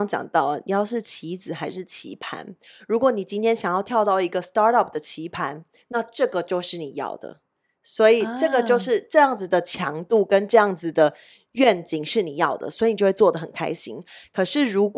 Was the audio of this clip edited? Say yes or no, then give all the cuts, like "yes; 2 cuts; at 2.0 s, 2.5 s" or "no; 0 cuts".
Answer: no; 0 cuts